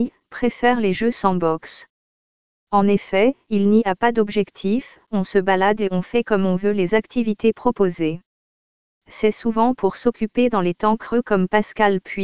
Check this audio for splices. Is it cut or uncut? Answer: uncut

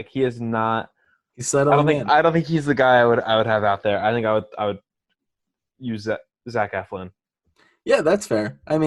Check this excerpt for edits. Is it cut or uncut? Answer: uncut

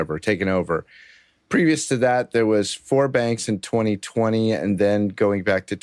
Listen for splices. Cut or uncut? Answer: uncut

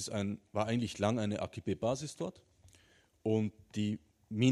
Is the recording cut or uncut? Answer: uncut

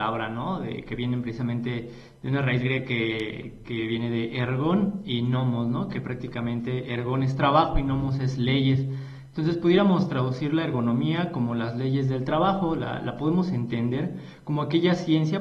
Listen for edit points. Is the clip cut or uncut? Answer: cut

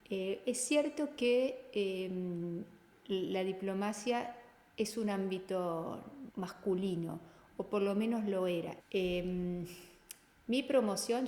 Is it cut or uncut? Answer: cut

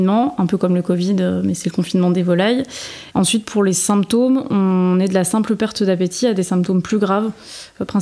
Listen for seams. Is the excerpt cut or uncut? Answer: cut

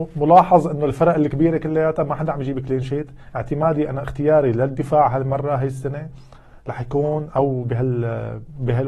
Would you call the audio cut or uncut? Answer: cut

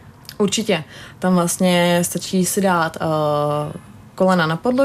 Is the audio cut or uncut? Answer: uncut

